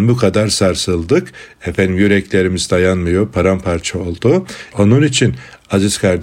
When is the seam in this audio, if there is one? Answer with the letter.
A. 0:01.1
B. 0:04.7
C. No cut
B